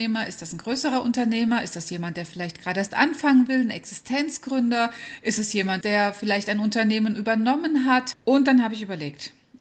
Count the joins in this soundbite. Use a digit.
2